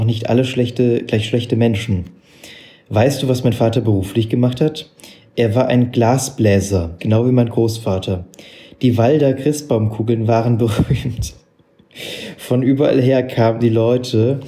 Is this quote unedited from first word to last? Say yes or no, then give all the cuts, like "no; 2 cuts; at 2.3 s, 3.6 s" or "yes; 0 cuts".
no; 1 cut; at 7.0 s